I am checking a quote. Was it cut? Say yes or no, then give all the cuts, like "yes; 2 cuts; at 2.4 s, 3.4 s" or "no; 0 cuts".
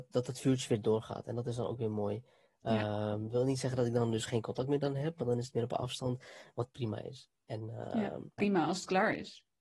yes; 1 cut; at 8.4 s